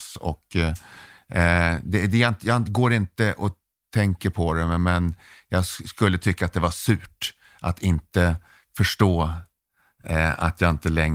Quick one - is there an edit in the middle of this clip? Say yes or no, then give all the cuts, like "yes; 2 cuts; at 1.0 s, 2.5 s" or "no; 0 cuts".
no; 0 cuts